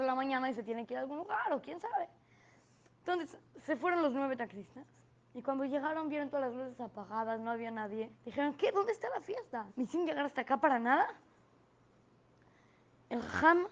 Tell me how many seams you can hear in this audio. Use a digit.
2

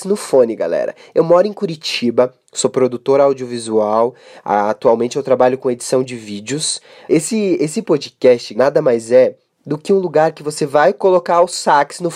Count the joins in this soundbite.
2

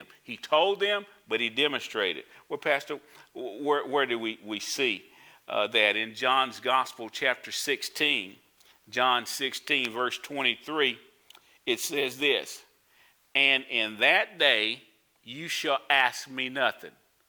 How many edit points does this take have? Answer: 0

